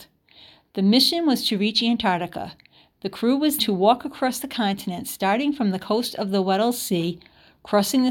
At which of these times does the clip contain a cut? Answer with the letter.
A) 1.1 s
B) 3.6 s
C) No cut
B